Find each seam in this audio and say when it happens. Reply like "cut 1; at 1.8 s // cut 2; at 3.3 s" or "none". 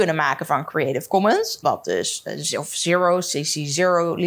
cut 1; at 1.6 s